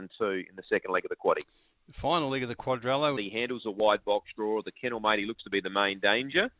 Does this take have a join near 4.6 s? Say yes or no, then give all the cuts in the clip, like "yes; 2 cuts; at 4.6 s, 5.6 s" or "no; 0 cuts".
no; 1 cut; at 3.2 s